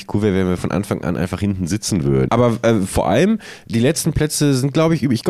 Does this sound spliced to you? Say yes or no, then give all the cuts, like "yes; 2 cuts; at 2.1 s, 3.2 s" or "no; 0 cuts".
yes; 1 cut; at 2.3 s